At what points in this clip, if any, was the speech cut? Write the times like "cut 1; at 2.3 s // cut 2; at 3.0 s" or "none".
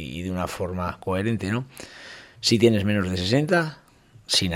cut 1; at 2.4 s